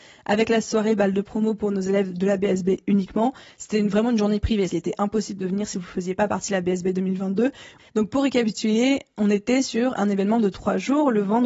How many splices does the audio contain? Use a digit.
2